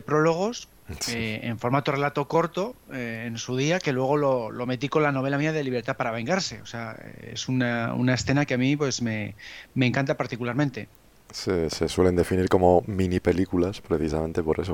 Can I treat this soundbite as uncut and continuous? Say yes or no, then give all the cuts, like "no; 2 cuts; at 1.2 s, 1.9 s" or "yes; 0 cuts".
yes; 0 cuts